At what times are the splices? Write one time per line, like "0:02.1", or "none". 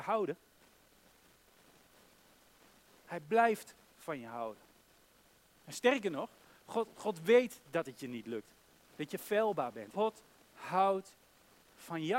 0:08.9
0:09.9